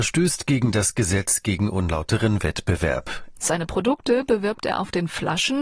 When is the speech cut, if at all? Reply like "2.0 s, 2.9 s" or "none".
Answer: 3.3 s